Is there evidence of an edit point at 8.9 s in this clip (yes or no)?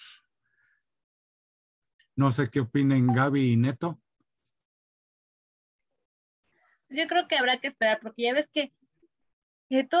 no